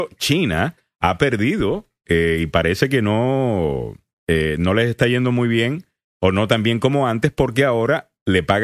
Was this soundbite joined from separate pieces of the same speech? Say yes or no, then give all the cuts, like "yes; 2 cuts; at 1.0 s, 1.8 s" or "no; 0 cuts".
no; 0 cuts